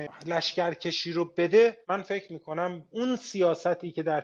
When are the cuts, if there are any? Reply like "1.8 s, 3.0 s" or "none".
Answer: 1.8 s

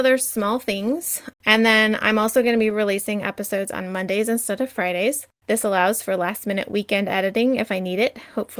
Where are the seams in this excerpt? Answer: 1.3 s

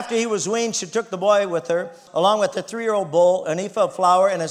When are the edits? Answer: 2.1 s

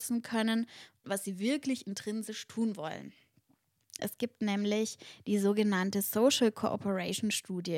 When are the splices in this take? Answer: 1.0 s, 4.0 s

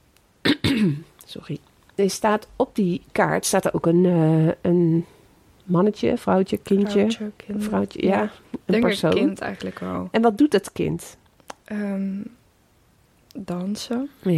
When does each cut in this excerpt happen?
none

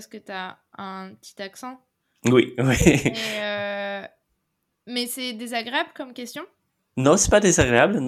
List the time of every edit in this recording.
none

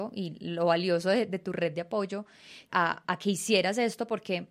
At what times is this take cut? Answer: 2.7 s

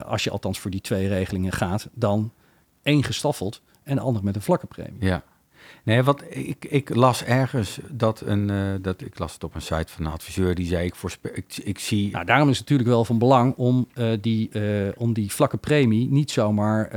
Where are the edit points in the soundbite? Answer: 12.1 s

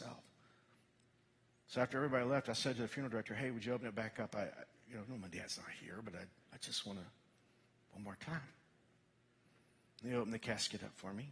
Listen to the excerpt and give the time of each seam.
none

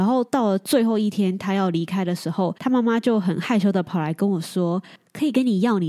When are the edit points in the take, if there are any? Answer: 2.6 s

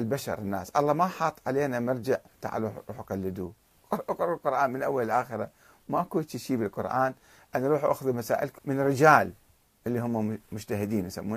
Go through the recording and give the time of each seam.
8.6 s

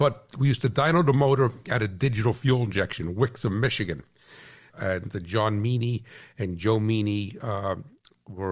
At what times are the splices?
4.7 s

